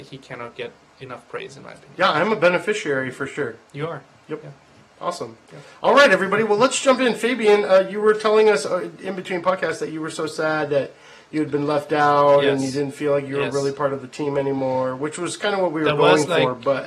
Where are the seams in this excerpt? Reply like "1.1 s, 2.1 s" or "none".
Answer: 3.7 s